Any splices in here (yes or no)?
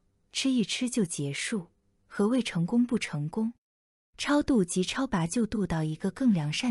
no